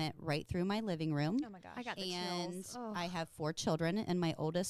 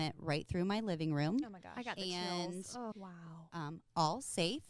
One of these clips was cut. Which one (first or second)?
second